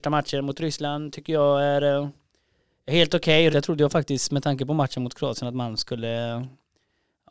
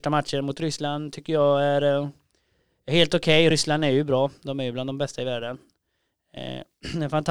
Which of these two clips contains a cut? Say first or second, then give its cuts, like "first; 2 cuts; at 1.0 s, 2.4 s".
first; 1 cut; at 3.5 s